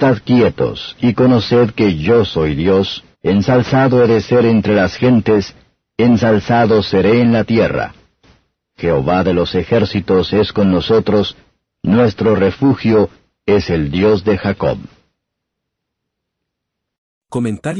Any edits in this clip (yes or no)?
yes